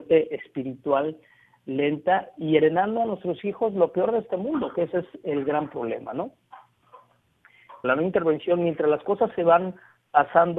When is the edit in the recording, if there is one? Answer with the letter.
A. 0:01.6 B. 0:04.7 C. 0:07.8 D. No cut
C